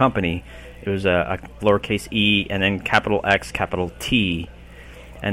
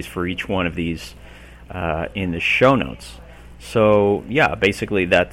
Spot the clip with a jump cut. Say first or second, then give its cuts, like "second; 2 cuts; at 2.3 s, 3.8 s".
first; 1 cut; at 1.6 s